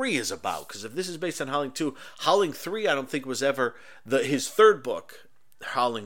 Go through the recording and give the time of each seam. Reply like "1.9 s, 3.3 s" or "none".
none